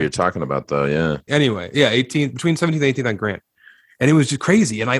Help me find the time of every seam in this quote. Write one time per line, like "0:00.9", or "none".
0:01.3

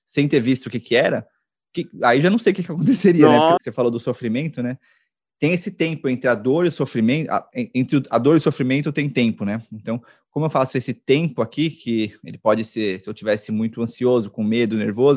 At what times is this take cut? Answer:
0:03.6

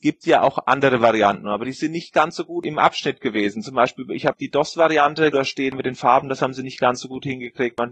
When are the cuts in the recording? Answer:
0:05.3

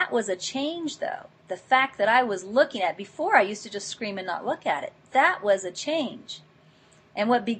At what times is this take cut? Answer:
none

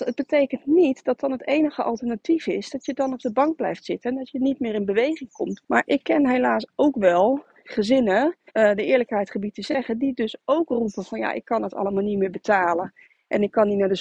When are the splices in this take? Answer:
0:05.6
0:08.5

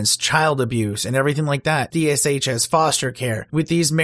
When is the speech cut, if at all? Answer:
0:01.9

